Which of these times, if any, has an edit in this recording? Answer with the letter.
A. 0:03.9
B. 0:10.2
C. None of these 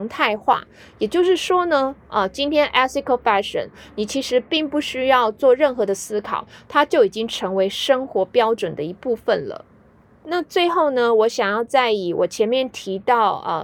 B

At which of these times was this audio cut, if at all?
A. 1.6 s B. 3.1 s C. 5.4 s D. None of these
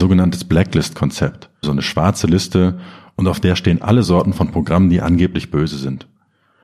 A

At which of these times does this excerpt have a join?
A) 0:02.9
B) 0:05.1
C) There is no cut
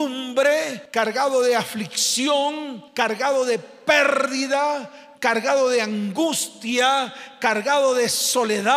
B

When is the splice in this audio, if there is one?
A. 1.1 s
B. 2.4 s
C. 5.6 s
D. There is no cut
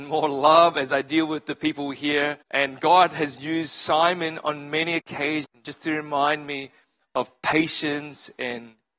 B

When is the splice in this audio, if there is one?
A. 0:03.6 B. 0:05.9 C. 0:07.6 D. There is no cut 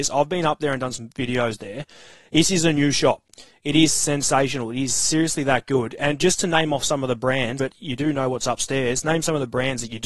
C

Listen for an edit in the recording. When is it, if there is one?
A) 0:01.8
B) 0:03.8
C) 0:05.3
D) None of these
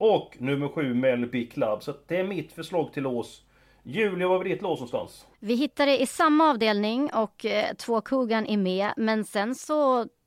C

